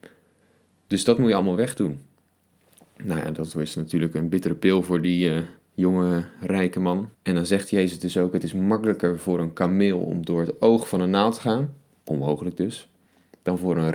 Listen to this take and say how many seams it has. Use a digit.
1